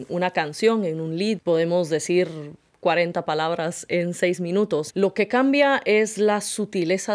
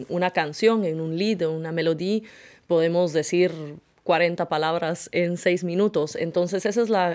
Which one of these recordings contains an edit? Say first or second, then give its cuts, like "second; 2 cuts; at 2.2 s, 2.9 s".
first; 2 cuts; at 1.4 s, 4.9 s